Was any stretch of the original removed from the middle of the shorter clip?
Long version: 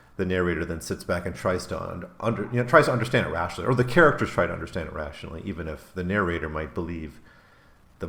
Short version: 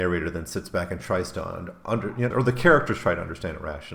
yes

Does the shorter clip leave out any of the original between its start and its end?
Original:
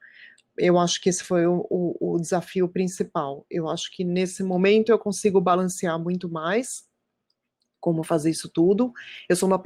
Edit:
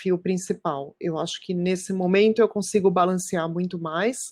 no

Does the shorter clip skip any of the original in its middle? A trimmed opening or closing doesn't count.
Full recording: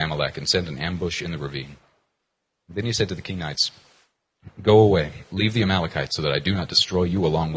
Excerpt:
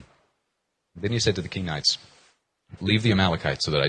yes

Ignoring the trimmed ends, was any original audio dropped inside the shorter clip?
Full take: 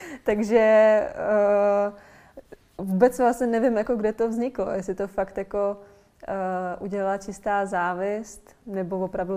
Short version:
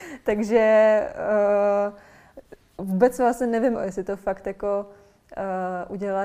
yes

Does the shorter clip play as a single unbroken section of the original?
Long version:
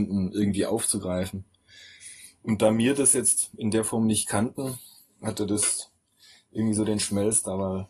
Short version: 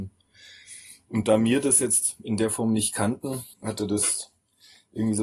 no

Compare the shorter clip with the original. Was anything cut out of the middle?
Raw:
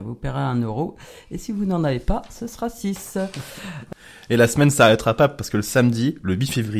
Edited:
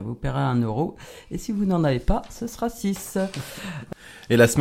no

